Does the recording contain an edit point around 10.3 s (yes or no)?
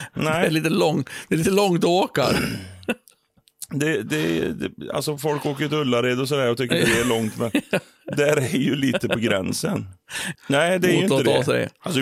yes